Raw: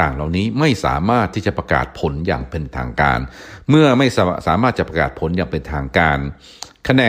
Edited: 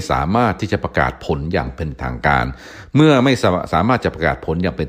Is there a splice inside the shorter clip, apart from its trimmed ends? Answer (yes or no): no